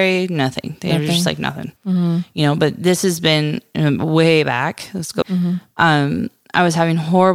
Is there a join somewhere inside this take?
yes; 2 cuts; at 1.8 s, 5.2 s

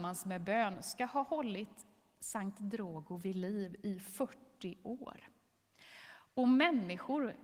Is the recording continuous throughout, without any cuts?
yes; 0 cuts

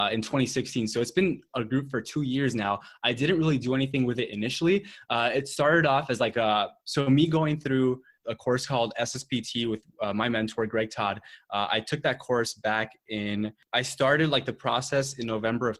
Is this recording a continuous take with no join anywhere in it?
yes; 0 cuts

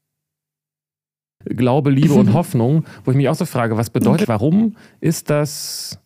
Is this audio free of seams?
no; 2 cuts; at 1.4 s, 4.2 s

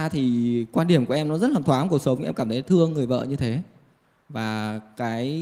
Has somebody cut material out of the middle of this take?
yes; 1 cut; at 1.6 s

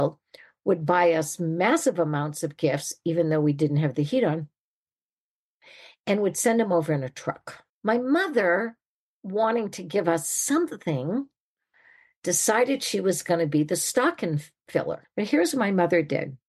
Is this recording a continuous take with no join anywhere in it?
no; 2 cuts; at 7.7 s, 15.0 s

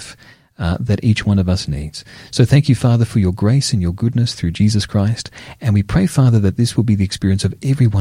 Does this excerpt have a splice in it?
no; 0 cuts

